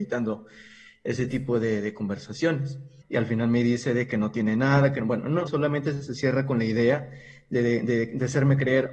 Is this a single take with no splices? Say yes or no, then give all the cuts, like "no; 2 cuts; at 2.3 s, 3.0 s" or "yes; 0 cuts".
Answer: no; 2 cuts; at 3.0 s, 5.5 s